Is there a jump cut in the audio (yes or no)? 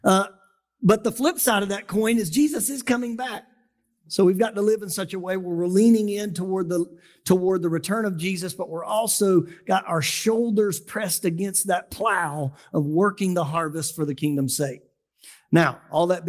no